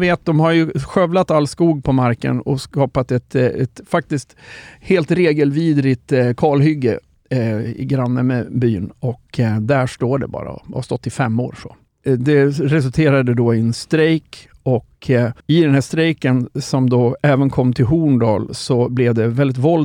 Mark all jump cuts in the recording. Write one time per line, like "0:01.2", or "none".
0:11.9
0:15.4